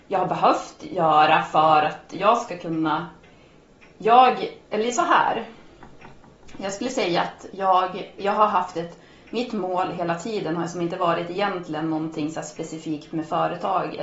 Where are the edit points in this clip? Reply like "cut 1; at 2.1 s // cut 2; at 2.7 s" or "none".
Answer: none